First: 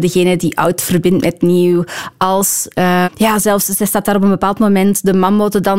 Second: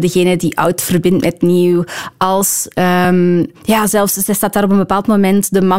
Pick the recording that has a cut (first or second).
first